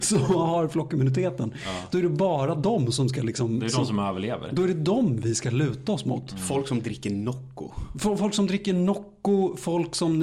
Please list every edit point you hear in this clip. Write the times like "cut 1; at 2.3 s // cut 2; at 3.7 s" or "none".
none